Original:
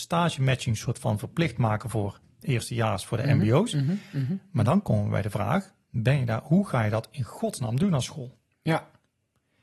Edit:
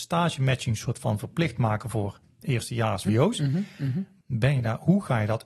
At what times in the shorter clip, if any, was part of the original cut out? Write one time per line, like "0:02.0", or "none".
0:03.0
0:04.2